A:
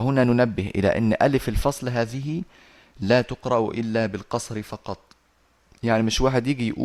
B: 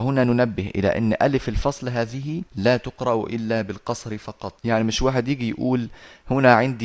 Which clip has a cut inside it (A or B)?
B